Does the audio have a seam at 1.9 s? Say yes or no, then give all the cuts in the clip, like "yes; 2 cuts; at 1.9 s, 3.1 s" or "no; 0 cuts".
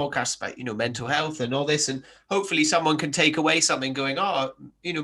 no; 0 cuts